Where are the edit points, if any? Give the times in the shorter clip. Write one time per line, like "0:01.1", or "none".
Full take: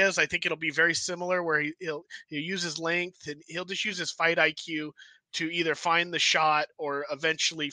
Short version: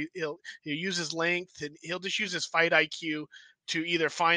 none